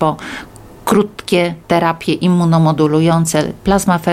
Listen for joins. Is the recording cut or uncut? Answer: cut